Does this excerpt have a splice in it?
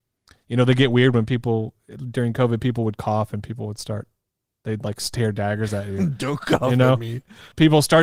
no; 0 cuts

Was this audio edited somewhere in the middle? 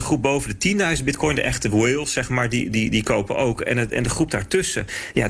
no; 0 cuts

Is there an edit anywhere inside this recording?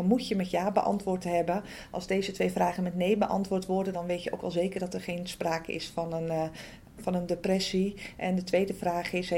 yes; 3 cuts; at 3.9 s, 7.0 s, 8.1 s

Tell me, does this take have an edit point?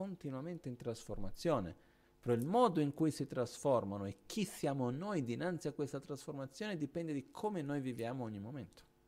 no; 0 cuts

